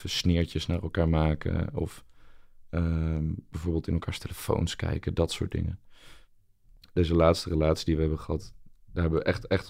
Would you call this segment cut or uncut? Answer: uncut